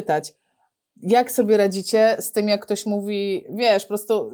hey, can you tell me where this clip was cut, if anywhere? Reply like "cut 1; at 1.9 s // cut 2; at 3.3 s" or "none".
none